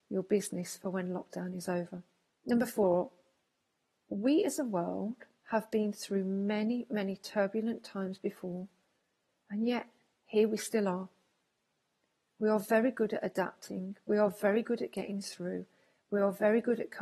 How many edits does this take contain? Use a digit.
1